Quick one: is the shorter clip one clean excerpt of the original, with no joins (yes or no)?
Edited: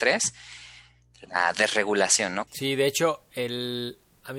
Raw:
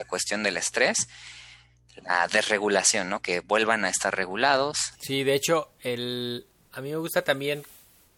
no